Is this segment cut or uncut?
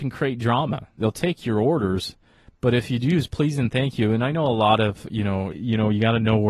cut